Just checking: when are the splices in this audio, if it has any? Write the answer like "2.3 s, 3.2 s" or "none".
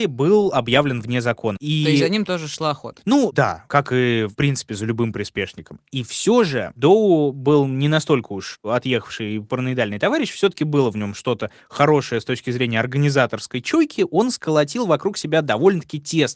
1.6 s